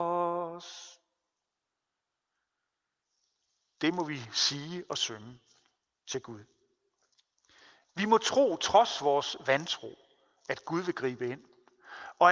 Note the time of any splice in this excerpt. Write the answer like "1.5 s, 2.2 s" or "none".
none